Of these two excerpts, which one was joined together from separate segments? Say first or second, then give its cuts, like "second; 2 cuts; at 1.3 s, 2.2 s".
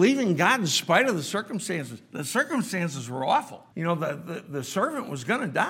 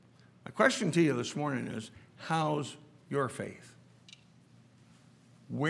first; 1 cut; at 3.7 s